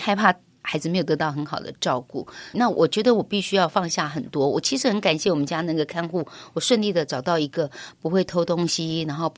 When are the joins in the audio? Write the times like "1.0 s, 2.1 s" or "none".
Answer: 2.5 s